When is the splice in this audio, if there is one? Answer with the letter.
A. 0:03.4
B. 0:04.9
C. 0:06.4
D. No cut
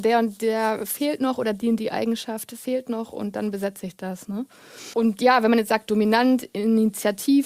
B